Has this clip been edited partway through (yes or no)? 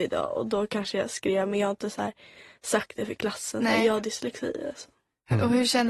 no